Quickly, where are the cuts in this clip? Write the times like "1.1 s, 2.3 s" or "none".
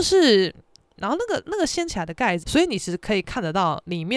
1.0 s, 2.4 s